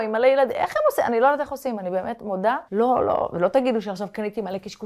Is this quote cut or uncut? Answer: cut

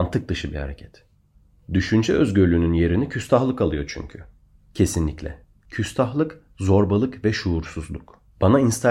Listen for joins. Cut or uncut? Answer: uncut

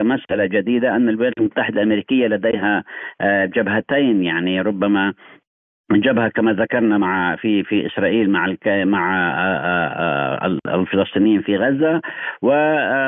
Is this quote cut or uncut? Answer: uncut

